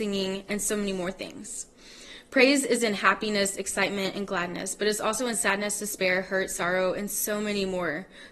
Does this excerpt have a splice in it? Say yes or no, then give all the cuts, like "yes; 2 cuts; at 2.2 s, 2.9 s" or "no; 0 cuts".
no; 0 cuts